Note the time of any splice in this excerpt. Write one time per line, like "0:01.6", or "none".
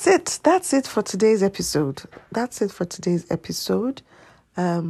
none